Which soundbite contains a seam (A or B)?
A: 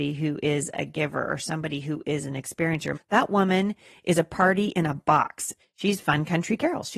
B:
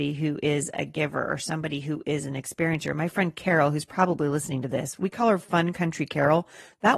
A